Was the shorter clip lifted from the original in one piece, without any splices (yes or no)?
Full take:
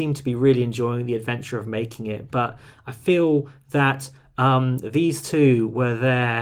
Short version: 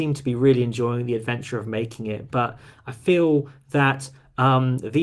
yes